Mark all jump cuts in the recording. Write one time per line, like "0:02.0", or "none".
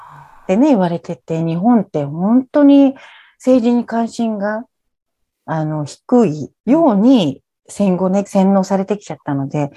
0:06.6
0:08.3